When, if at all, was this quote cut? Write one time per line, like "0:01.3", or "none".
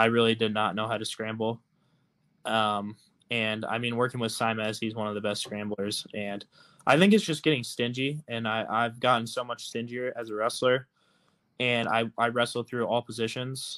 none